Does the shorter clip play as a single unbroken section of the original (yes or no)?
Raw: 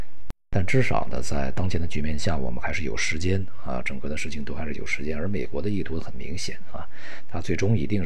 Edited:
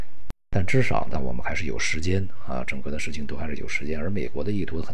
no